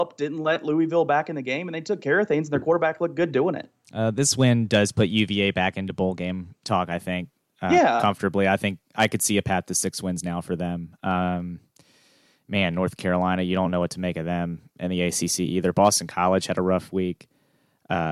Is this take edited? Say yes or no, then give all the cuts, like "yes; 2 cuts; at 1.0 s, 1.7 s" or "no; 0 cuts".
no; 0 cuts